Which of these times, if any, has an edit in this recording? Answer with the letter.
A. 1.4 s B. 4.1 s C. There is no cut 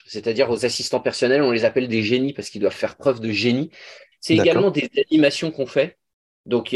B